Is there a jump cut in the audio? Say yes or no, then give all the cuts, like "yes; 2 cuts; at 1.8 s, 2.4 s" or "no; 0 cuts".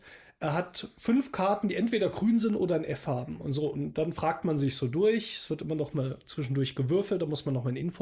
no; 0 cuts